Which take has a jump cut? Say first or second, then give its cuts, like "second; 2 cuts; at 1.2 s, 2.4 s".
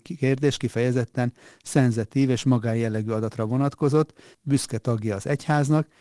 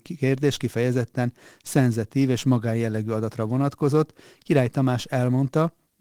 first; 1 cut; at 4.3 s